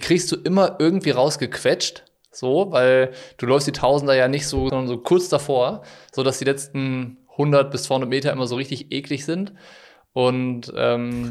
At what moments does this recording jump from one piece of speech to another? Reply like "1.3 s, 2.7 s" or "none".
4.7 s